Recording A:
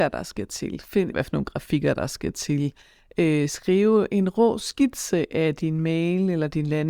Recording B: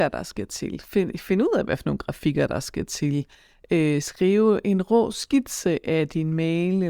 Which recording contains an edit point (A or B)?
A